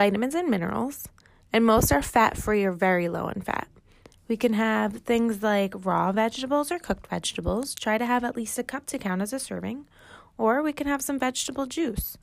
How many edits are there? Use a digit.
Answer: 1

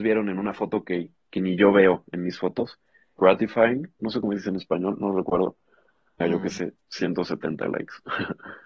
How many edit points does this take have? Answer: 2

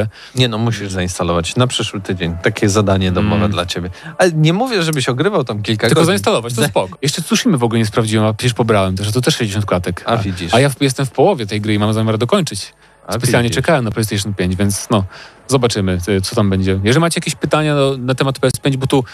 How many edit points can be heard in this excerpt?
1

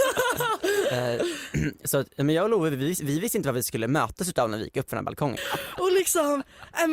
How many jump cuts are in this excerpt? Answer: 1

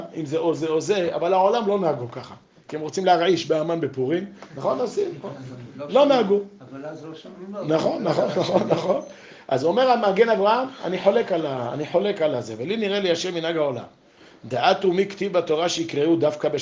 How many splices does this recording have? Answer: 0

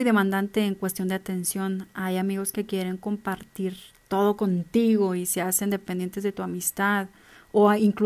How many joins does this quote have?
0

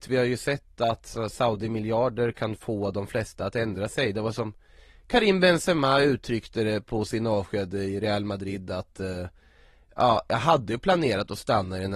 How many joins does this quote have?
0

